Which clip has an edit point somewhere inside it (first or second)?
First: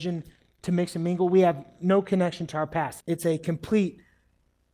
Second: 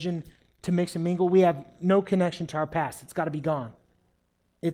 first